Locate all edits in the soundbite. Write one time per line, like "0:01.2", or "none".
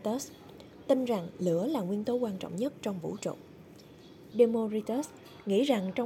0:04.3